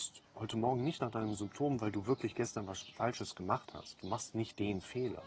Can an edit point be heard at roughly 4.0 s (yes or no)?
no